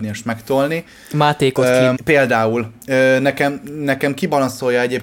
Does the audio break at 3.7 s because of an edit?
no; 1 cut; at 2.0 s

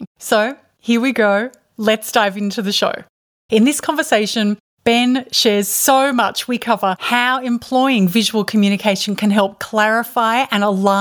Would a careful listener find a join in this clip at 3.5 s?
yes; 1 cut; at 3.5 s

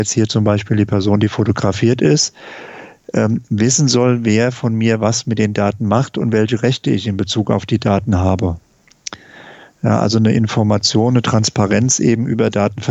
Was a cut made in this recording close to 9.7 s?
no; 0 cuts

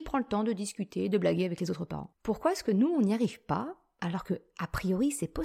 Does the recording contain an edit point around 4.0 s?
no; 1 cut; at 2.2 s

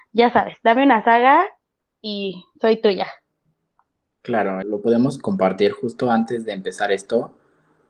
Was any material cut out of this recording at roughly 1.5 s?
no; 1 cut; at 4.6 s

